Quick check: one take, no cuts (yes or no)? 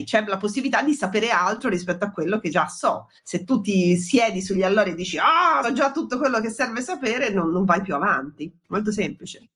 no